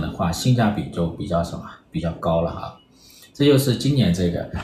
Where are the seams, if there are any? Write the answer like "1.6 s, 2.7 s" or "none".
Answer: none

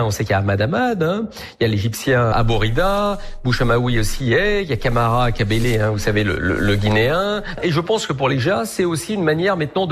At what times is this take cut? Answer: none

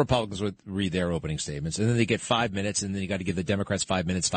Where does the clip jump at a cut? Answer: none

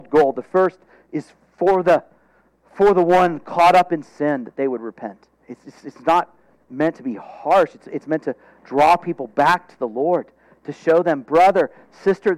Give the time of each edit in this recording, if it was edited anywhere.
5.4 s

